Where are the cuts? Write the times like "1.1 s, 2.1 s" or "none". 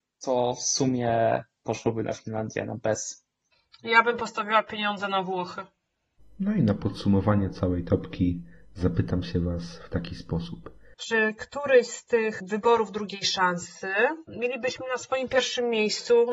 6.2 s, 10.9 s